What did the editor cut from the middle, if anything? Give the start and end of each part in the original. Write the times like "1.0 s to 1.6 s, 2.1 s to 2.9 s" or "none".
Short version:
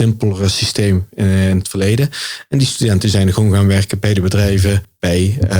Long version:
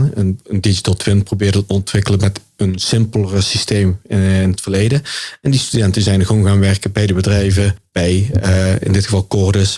none